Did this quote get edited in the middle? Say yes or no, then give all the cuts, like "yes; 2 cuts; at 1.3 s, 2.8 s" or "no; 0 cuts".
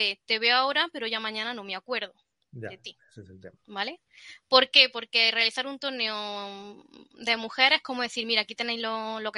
yes; 1 cut; at 3.6 s